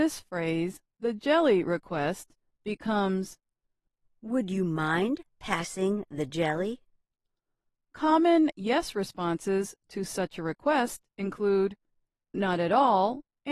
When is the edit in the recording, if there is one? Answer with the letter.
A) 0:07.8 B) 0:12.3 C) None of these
B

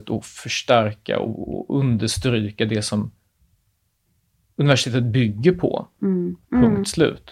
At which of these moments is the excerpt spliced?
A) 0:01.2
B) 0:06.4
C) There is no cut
B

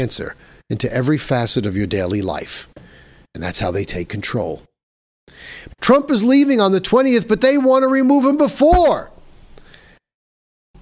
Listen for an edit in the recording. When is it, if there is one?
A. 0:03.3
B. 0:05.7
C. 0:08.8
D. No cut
B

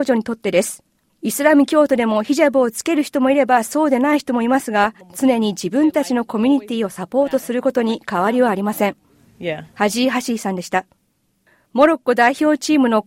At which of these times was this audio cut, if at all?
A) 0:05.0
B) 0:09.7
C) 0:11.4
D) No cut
A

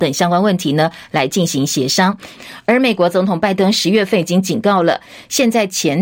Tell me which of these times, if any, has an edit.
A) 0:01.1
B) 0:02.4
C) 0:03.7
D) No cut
B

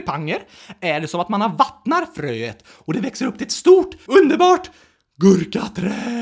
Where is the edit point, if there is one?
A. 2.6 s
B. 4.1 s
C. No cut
B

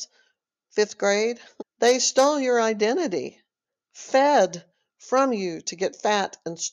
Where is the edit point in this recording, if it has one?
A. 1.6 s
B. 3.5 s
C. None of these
A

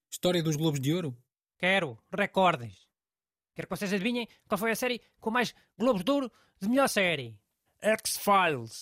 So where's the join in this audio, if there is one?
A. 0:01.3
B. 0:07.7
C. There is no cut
B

